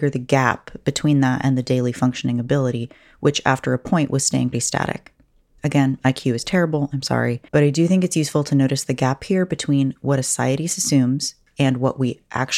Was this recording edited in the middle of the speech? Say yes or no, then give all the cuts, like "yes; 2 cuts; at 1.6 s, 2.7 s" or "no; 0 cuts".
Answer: yes; 2 cuts; at 4.5 s, 7.5 s